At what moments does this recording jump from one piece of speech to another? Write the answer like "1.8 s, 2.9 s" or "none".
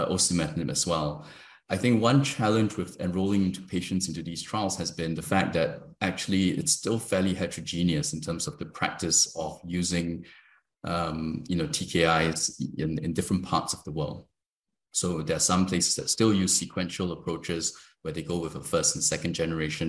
none